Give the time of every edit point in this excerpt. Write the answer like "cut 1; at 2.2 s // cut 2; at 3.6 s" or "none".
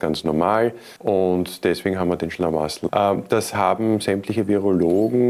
cut 1; at 1.0 s // cut 2; at 2.9 s

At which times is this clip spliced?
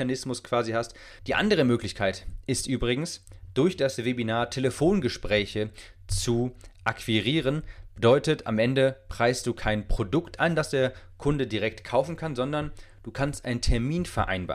cut 1; at 1.2 s

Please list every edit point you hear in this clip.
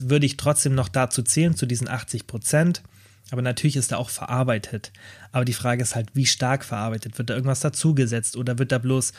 none

